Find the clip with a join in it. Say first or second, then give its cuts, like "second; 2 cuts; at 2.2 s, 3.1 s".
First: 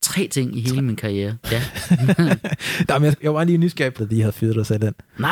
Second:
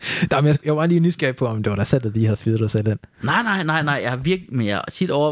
first; 2 cuts; at 1.4 s, 4.0 s